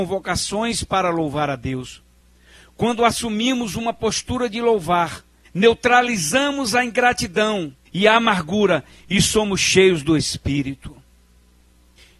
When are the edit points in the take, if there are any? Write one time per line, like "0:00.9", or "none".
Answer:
0:05.4
0:07.9